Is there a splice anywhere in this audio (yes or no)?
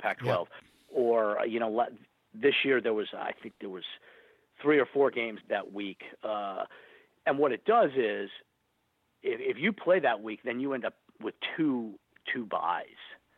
yes